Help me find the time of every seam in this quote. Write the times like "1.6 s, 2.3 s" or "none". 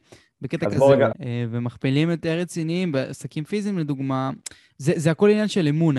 1.1 s